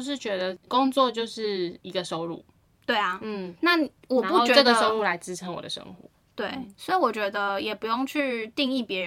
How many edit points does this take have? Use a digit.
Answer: 0